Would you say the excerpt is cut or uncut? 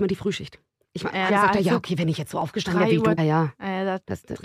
cut